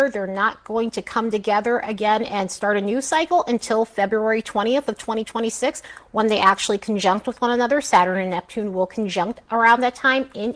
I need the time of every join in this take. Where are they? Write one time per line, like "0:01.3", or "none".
none